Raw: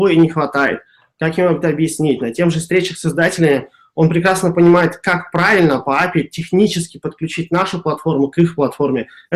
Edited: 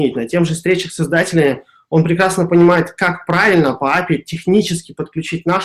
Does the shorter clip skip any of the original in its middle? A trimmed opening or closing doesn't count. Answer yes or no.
no